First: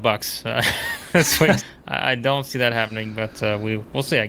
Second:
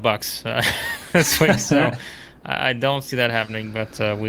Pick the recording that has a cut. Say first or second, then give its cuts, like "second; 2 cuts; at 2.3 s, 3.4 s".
first; 1 cut; at 1.6 s